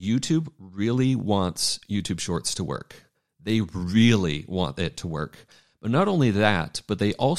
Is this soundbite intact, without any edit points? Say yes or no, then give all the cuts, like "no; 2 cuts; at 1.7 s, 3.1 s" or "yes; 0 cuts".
yes; 0 cuts